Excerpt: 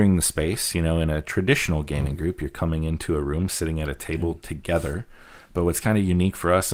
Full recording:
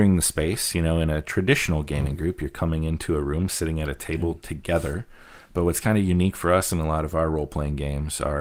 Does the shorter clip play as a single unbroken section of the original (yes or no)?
yes